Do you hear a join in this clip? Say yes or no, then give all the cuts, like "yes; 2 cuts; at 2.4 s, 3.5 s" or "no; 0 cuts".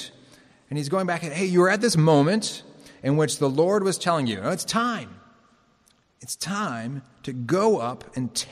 no; 0 cuts